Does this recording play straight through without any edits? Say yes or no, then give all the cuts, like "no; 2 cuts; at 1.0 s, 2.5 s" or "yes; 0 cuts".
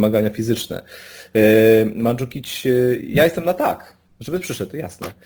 yes; 0 cuts